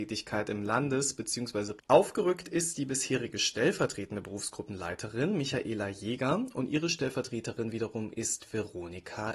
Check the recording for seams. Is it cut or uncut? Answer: cut